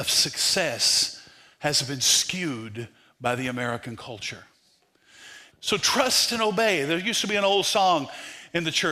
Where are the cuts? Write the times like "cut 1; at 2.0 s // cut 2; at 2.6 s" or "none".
cut 1; at 5.5 s